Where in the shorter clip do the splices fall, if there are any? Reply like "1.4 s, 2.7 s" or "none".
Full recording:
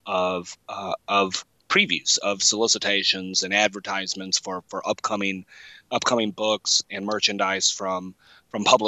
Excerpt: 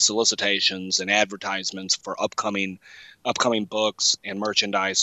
2.0 s

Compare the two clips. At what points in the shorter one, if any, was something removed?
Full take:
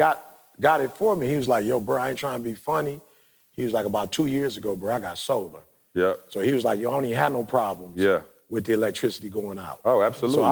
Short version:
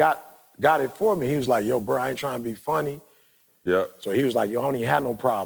3.5 s

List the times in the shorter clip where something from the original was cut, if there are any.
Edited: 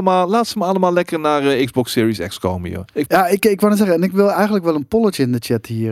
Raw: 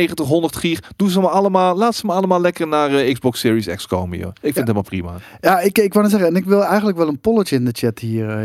3.1 s

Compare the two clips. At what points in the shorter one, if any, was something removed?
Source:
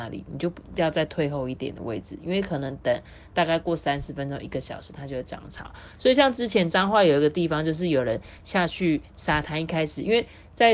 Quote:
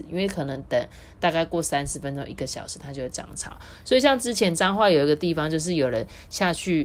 none

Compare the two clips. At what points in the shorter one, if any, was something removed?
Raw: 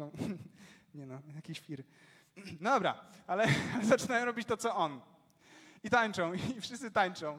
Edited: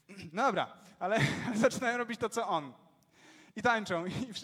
none

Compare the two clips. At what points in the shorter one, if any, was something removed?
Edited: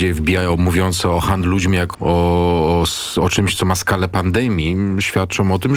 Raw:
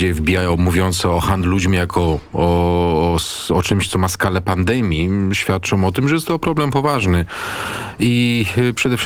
1.9 s

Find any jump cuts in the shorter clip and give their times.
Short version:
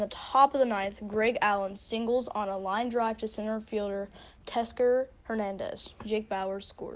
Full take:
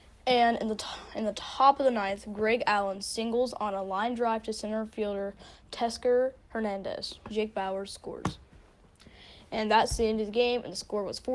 none

